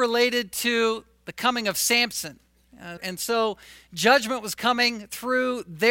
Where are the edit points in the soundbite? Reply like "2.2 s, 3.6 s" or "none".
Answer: 3.0 s